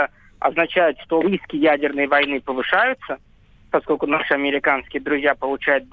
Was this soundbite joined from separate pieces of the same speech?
yes; 1 cut; at 1.2 s

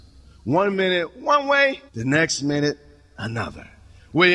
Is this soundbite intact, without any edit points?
no; 1 cut; at 1.9 s

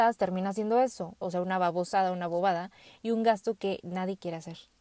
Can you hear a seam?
yes; 1 cut; at 1.2 s

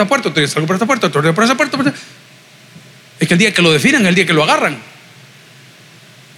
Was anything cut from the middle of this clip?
no; 0 cuts

